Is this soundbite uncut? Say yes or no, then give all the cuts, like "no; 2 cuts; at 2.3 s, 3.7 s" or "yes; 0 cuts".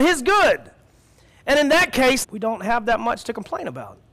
no; 1 cut; at 2.2 s